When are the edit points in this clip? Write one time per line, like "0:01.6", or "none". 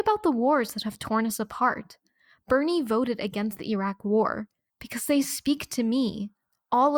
0:04.7